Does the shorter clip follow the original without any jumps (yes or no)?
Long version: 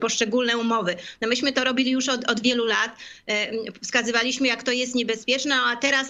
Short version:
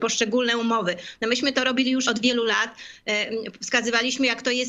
no